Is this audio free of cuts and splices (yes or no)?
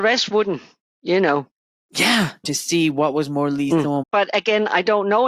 no